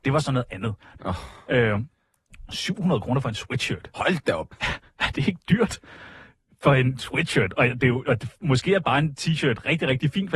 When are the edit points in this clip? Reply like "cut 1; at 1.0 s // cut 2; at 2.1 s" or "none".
cut 1; at 1.0 s

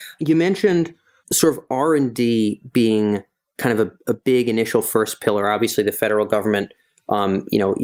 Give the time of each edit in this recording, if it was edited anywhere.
none

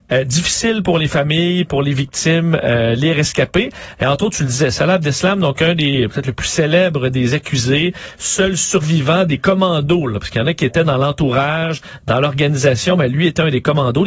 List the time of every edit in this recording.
none

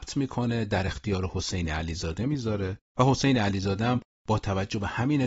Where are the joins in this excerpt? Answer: none

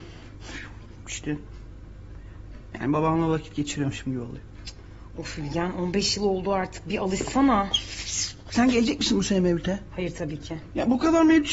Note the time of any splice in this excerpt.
cut 1; at 1.0 s

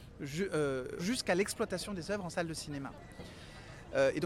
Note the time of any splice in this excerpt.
cut 1; at 1.0 s

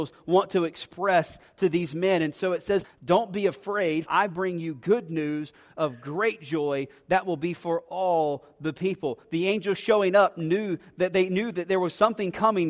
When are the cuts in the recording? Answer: cut 1; at 2.8 s // cut 2; at 4.1 s

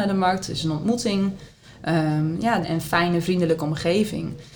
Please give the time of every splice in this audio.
cut 1; at 2.6 s

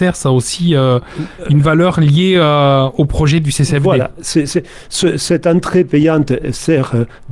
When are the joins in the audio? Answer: none

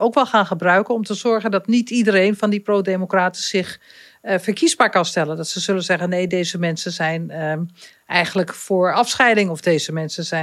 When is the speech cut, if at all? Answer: none

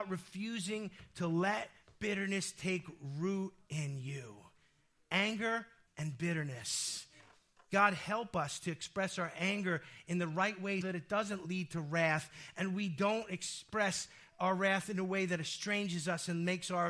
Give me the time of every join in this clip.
cut 1; at 5.9 s // cut 2; at 10.8 s

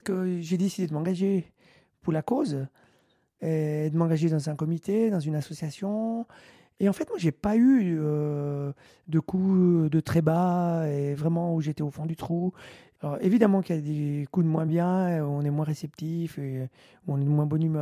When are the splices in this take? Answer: none

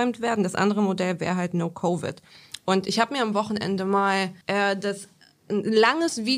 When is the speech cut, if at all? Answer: cut 1; at 4.4 s

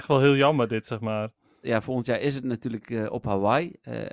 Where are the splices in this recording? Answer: cut 1; at 1.6 s

